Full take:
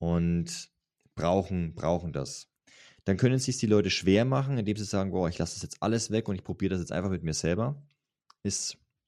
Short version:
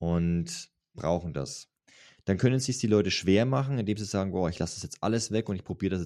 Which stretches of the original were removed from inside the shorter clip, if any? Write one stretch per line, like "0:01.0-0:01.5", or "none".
0:00.9-0:01.7